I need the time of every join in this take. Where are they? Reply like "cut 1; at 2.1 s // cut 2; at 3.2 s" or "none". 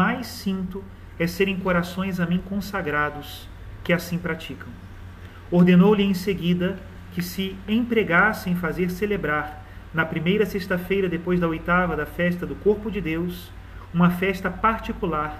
none